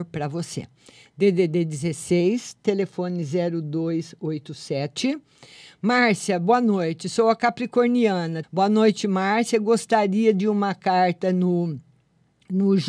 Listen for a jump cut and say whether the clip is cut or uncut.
cut